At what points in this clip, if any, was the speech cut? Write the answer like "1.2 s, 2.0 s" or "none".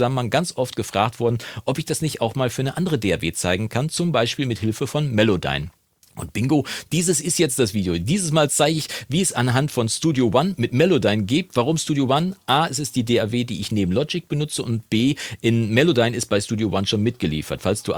none